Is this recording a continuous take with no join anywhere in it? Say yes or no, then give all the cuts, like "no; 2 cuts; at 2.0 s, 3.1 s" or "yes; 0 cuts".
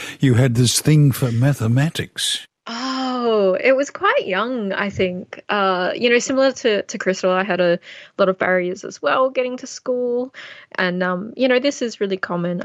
no; 1 cut; at 2.6 s